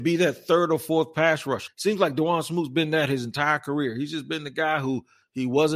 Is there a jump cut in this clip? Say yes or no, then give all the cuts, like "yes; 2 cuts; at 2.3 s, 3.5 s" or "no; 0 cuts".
yes; 1 cut; at 1.7 s